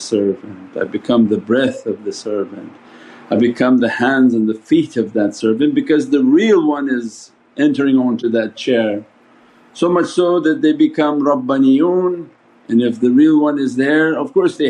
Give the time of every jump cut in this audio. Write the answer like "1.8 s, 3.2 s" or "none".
none